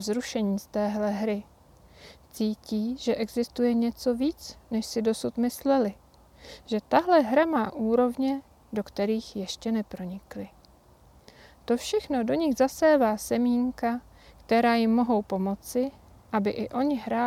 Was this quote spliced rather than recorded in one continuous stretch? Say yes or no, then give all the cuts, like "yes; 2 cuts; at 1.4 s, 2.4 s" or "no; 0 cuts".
no; 0 cuts